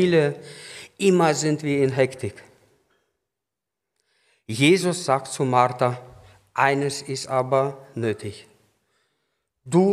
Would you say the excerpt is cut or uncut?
uncut